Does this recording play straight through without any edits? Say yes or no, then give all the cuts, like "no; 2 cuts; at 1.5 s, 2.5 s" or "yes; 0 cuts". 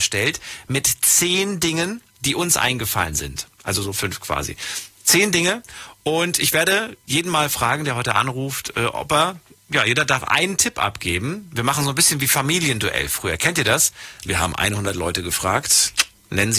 no; 1 cut; at 3.9 s